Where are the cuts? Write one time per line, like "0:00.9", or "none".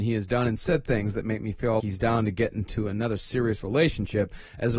0:01.8